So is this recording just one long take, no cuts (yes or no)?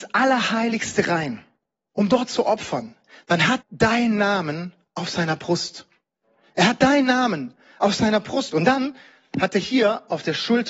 no